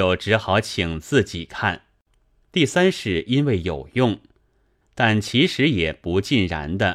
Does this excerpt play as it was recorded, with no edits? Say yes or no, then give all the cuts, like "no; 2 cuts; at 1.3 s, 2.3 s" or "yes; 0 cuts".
no; 2 cuts; at 2.4 s, 4.8 s